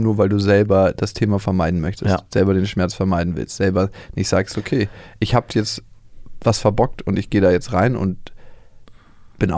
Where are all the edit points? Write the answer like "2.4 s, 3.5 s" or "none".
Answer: none